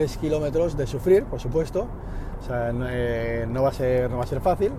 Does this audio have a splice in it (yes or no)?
no